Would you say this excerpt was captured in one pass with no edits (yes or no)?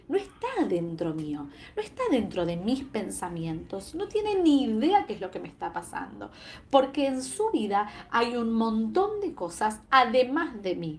yes